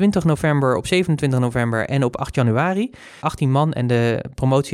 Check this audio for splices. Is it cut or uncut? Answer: cut